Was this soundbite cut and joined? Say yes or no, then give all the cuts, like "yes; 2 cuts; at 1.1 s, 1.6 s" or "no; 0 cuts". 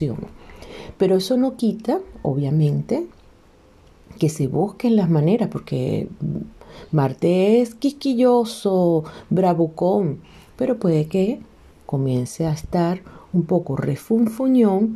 no; 0 cuts